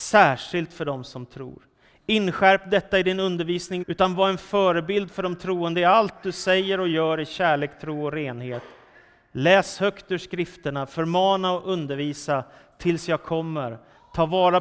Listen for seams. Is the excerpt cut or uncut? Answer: cut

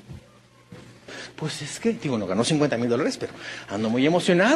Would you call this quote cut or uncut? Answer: uncut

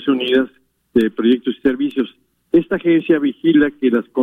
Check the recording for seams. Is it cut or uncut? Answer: uncut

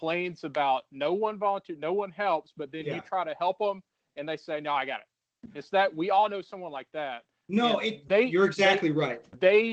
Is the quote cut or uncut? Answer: uncut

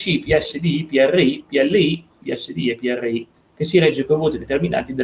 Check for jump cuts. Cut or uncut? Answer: cut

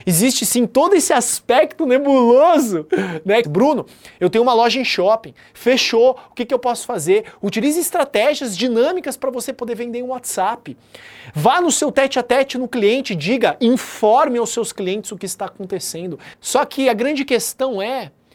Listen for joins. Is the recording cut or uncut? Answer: cut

